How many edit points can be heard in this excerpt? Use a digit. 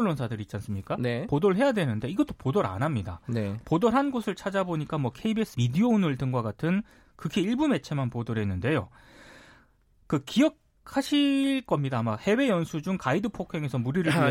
1